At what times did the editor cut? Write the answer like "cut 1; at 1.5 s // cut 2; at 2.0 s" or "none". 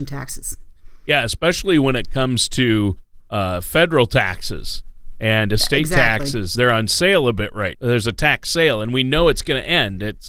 cut 1; at 6.6 s // cut 2; at 7.7 s